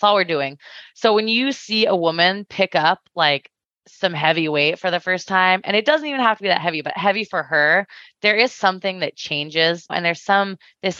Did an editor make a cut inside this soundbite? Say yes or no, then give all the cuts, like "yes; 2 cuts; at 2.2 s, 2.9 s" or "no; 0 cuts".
yes; 1 cut; at 9.9 s